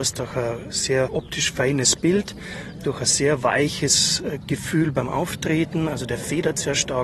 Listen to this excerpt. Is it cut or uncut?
uncut